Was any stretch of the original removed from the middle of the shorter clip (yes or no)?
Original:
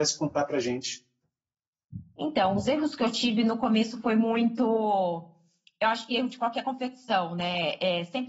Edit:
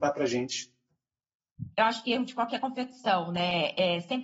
yes